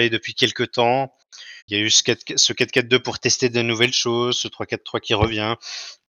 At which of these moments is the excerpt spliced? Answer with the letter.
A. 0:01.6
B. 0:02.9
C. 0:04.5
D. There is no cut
A